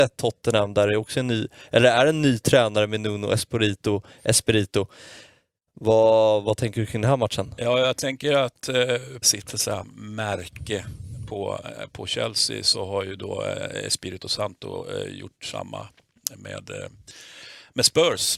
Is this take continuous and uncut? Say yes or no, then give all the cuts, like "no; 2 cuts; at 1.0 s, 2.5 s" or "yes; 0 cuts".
no; 1 cut; at 9.2 s